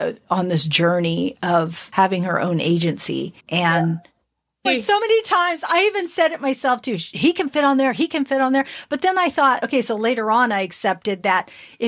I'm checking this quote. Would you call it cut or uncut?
cut